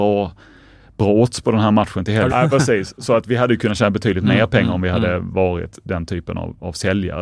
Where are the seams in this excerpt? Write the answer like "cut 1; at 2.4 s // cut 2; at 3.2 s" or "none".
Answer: cut 1; at 2.3 s